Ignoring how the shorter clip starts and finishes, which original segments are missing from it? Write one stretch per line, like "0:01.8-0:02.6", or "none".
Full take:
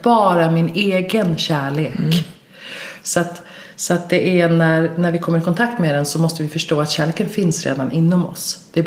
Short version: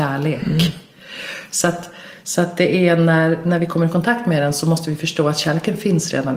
none